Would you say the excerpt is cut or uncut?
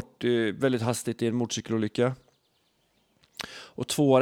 uncut